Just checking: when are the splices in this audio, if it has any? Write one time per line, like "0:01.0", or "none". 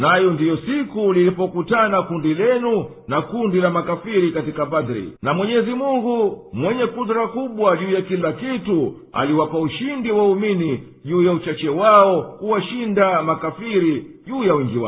0:05.2